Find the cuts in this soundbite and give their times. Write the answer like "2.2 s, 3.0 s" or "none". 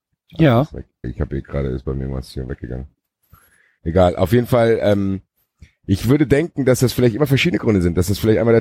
1.0 s